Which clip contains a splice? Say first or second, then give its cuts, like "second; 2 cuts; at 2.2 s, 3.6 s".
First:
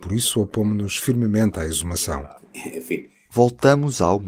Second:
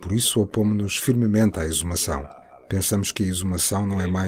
first; 1 cut; at 2.4 s